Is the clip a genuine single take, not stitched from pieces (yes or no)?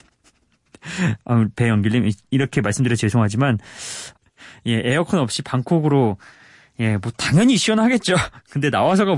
no